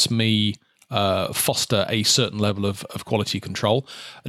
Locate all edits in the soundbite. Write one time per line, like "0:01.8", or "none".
none